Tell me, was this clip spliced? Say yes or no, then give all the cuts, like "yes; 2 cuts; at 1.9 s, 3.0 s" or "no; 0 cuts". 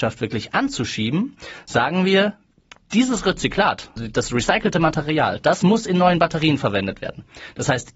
yes; 1 cut; at 4.0 s